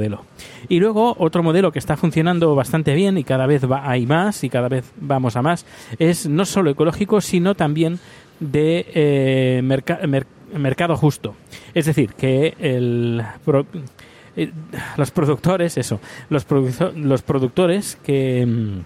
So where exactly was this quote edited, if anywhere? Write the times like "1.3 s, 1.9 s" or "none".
none